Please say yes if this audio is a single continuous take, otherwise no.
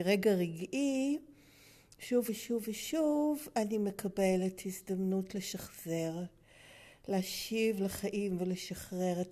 yes